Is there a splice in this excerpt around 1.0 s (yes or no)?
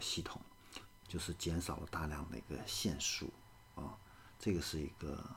yes